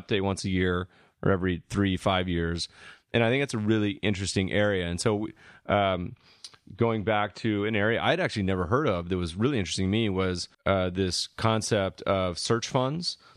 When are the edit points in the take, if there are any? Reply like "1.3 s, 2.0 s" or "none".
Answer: 10.5 s

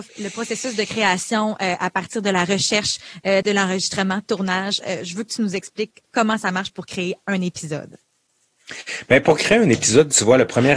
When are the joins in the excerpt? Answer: 3.4 s

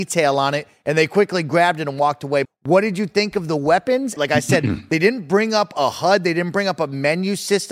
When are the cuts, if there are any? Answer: 2.4 s, 4.2 s

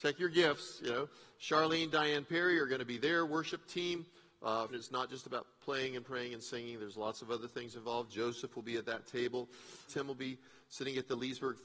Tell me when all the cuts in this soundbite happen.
4.7 s, 9.9 s

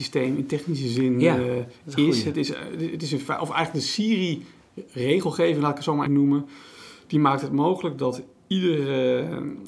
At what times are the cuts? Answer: 6.1 s

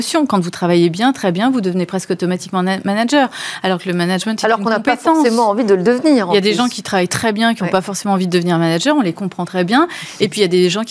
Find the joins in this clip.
none

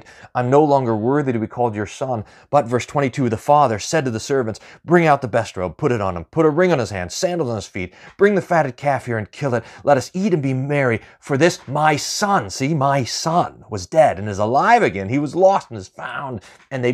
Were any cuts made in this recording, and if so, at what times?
none

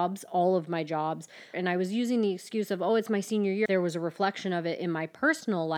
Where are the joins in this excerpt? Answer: 1.5 s, 3.7 s

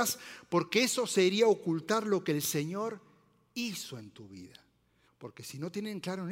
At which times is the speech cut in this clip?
5.1 s

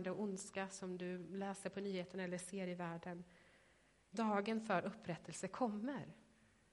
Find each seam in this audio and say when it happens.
4.0 s

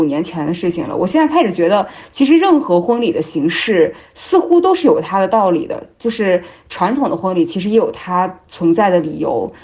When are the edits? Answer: none

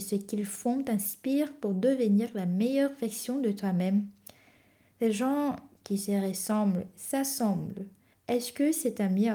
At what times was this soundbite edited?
8.1 s

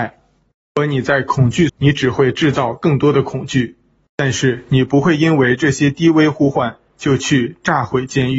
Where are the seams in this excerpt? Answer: 1.7 s, 4.1 s

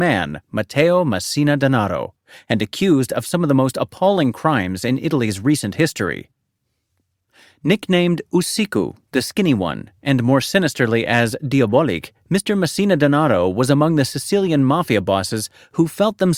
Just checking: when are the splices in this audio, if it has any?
none

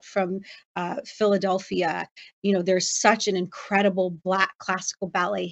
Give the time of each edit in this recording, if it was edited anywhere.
none

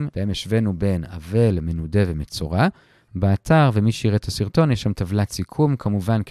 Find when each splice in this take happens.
none

